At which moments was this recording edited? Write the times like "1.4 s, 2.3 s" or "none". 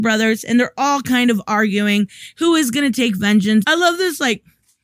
3.6 s